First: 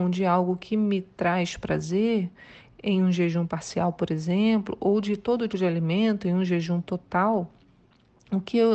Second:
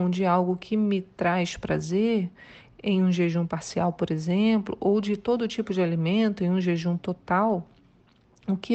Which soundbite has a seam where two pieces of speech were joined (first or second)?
first